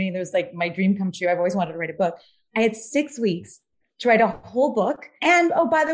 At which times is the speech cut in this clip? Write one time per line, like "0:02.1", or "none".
none